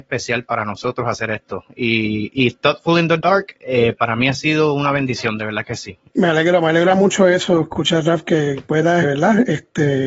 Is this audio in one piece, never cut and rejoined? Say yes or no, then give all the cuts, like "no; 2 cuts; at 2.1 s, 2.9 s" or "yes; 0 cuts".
no; 2 cuts; at 6.1 s, 9.0 s